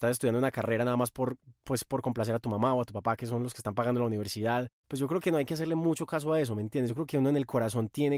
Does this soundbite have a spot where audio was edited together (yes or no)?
no